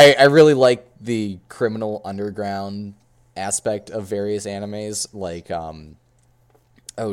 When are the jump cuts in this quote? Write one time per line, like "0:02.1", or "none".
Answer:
none